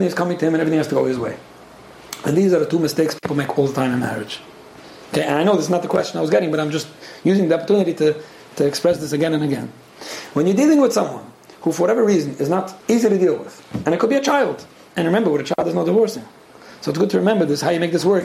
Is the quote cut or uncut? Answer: cut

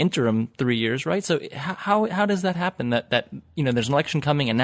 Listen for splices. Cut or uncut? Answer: uncut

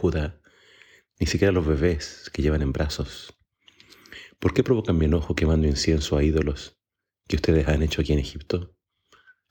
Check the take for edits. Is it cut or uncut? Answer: uncut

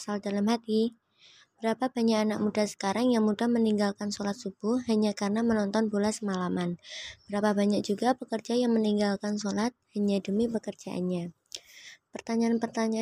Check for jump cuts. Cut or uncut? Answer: uncut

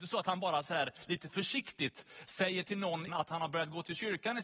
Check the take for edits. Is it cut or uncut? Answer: cut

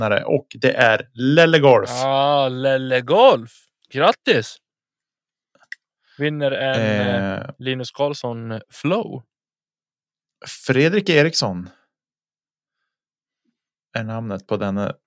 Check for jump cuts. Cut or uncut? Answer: uncut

